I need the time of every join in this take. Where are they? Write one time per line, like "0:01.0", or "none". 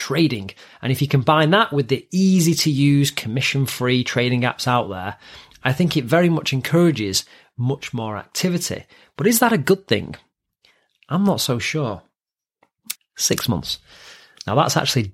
0:13.0